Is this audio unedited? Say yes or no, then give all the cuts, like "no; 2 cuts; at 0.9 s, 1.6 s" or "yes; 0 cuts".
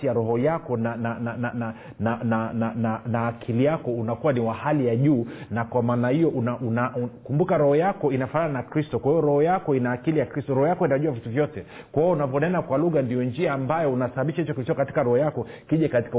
yes; 0 cuts